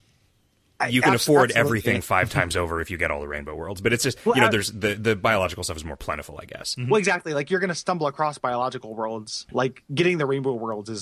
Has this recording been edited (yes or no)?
no